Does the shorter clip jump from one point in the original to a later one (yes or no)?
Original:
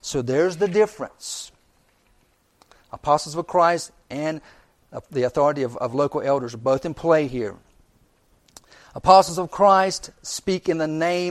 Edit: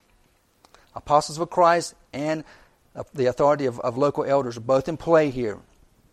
no